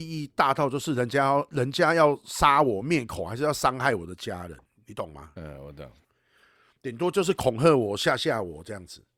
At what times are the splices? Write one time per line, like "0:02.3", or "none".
none